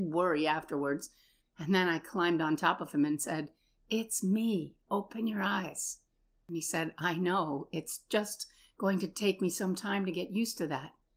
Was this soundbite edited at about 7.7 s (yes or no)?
no